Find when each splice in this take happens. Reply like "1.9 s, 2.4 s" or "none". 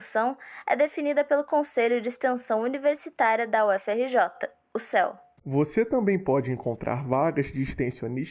5.4 s